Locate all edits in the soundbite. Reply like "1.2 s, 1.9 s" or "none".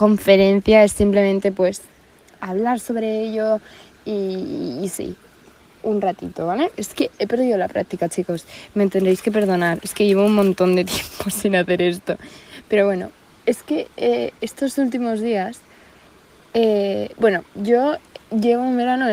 6.7 s, 17.5 s